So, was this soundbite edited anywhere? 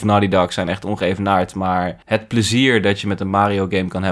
yes; 1 cut; at 2.0 s

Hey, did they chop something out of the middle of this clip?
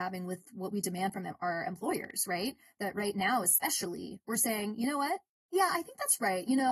yes; 1 cut; at 5.5 s

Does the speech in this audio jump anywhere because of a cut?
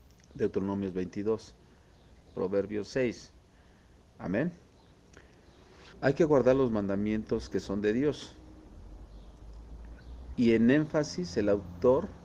yes; 3 cuts; at 2.3 s, 5.9 s, 10.3 s

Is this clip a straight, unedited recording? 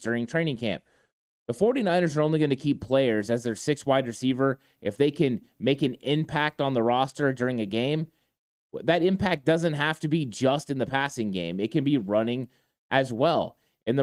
yes; 0 cuts

